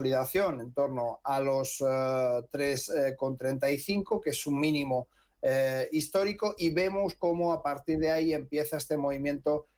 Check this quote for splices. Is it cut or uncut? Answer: uncut